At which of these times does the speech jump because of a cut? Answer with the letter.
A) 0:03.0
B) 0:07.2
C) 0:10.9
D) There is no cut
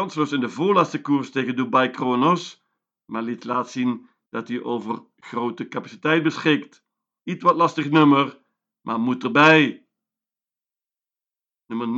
B